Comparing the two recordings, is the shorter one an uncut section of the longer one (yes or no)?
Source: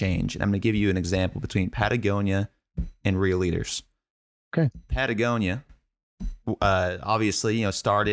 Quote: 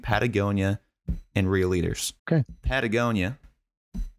no